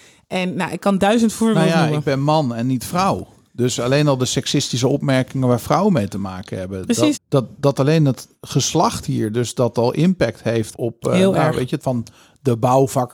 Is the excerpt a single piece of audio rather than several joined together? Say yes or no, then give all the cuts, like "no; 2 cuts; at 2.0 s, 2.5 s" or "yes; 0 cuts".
no; 3 cuts; at 7.1 s, 10.7 s, 11.8 s